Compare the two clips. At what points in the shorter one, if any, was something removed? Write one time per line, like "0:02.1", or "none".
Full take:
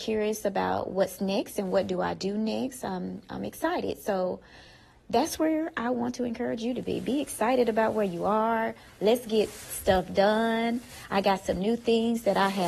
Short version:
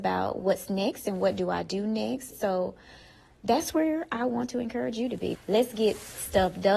0:02.3
0:05.3